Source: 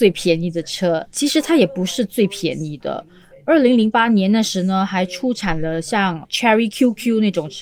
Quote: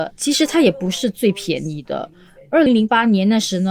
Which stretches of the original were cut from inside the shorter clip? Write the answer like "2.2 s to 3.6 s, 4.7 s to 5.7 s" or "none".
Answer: 3.6 s to 3.7 s